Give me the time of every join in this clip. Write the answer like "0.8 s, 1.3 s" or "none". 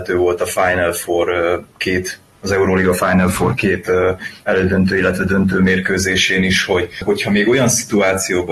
none